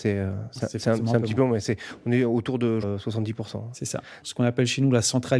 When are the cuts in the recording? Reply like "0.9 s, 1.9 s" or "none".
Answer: 2.8 s, 4.2 s

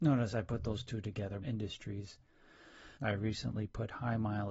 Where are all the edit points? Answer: 1.4 s, 3.0 s

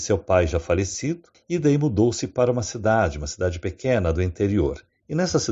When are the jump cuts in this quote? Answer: 1.3 s

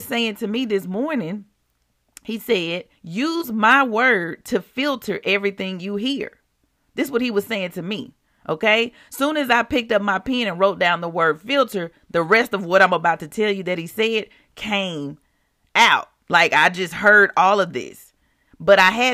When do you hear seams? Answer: 2.9 s

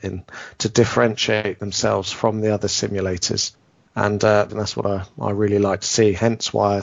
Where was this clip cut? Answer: 4.5 s

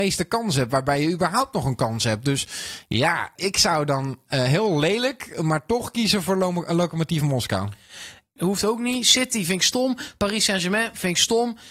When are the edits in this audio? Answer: 3.4 s, 8.4 s

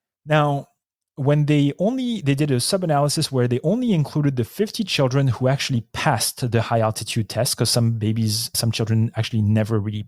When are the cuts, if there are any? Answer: none

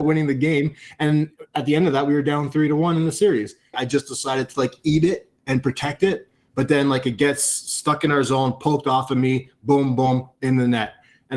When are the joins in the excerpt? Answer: 3.7 s

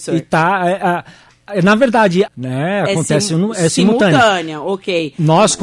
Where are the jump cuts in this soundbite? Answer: 2.3 s

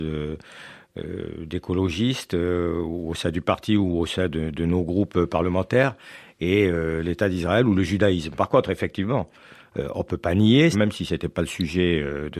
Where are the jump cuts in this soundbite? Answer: 8.3 s, 10.7 s

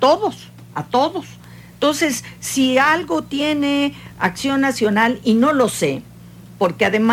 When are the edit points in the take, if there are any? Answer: none

